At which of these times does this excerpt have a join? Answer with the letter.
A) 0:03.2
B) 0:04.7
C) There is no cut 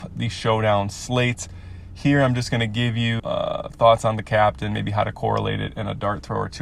A